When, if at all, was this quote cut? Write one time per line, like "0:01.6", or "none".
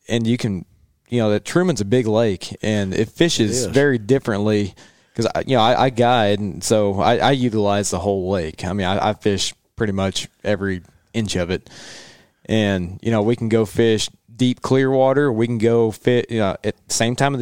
none